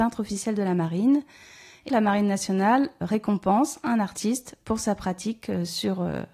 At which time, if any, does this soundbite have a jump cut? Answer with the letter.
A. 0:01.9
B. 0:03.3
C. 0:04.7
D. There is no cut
A